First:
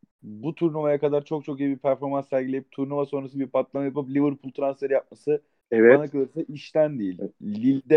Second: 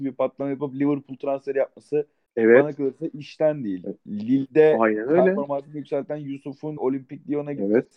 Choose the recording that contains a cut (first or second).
second